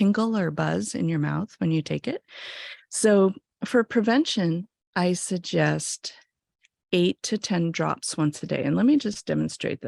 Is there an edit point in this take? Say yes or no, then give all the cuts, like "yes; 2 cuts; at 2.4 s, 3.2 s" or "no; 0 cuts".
yes; 1 cut; at 2.8 s